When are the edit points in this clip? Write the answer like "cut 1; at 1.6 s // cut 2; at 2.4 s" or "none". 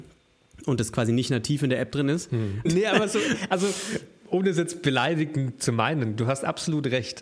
cut 1; at 2.7 s